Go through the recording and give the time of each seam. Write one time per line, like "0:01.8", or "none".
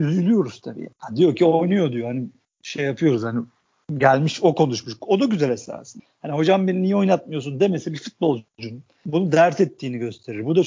none